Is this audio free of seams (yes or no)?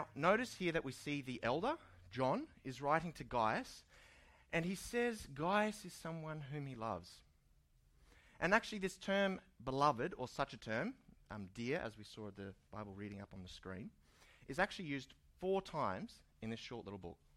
yes